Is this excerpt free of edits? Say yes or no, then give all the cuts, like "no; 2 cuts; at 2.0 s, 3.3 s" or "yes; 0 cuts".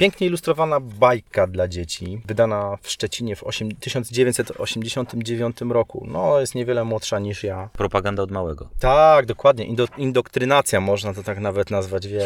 yes; 0 cuts